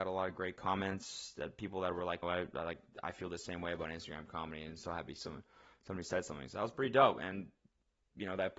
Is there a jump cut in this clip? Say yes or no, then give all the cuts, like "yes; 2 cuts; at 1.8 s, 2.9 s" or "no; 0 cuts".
yes; 1 cut; at 2.2 s